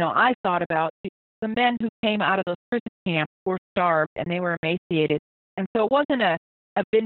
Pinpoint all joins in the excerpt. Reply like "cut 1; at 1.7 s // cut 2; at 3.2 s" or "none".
cut 1; at 5.5 s